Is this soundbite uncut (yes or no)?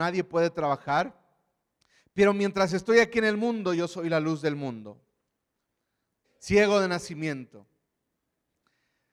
no